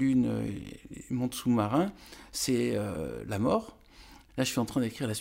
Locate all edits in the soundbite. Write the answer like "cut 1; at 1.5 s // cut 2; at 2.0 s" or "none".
cut 1; at 4.3 s